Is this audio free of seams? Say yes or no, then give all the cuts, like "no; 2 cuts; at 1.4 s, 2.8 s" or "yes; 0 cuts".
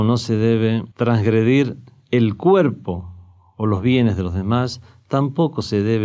no; 1 cut; at 0.9 s